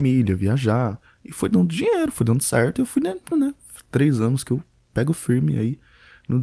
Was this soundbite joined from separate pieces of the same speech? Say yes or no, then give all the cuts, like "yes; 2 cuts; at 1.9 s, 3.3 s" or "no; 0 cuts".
yes; 1 cut; at 3.3 s